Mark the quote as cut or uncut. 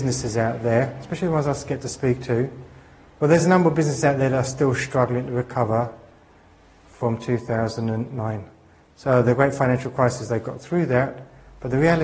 uncut